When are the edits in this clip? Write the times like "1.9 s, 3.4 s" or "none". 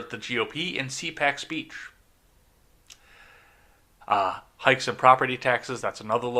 4.0 s